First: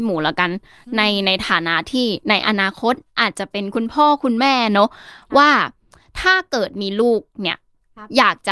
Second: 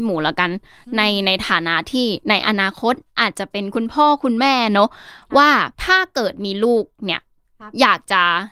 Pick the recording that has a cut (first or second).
second